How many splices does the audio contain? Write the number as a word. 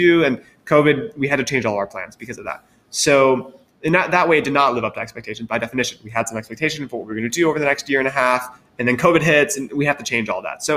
zero